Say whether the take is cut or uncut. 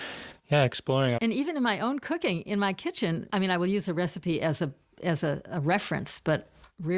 cut